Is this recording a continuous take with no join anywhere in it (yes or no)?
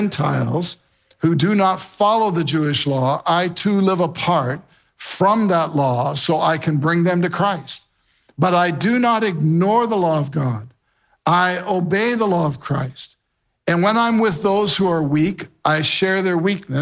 yes